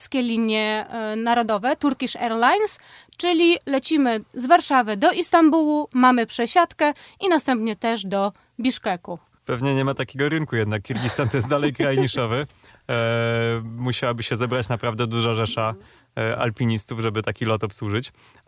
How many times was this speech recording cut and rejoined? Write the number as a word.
one